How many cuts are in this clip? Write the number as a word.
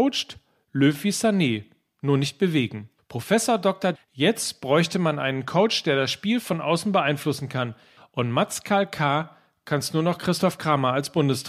two